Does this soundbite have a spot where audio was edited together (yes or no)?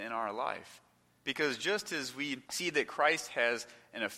yes